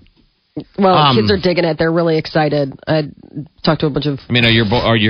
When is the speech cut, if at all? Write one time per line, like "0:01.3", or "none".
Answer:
none